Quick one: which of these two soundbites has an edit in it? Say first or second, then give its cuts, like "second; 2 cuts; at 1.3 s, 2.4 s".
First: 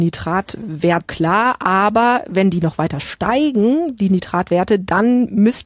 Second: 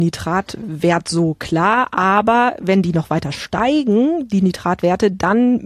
first; 1 cut; at 1.0 s